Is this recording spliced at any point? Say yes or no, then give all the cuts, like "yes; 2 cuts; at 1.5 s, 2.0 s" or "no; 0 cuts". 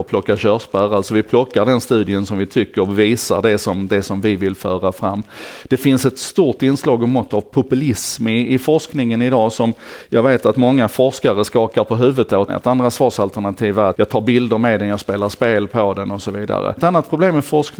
yes; 3 cuts; at 12.5 s, 13.9 s, 16.8 s